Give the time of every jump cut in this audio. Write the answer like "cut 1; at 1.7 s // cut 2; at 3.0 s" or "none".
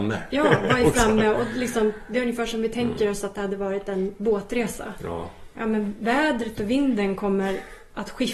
none